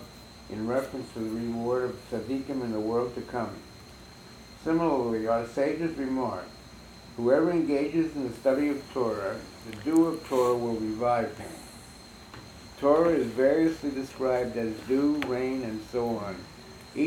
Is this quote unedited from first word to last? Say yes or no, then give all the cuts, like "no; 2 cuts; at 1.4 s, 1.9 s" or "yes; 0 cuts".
yes; 0 cuts